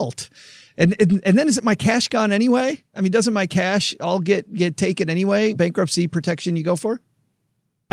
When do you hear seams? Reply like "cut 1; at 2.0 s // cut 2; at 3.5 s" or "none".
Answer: cut 1; at 5.5 s